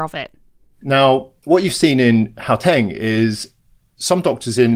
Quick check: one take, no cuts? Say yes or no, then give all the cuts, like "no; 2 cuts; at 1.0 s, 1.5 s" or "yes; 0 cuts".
yes; 0 cuts